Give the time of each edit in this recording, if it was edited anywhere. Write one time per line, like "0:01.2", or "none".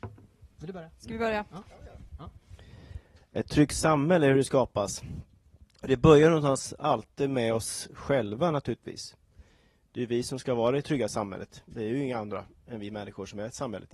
0:01.6